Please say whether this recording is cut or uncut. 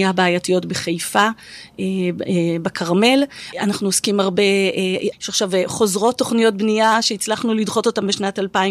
cut